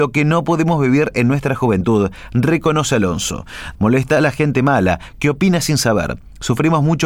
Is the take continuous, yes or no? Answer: no